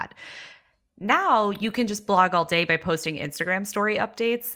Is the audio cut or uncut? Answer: uncut